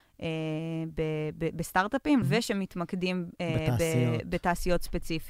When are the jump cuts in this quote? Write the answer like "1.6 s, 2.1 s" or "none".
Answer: 2.2 s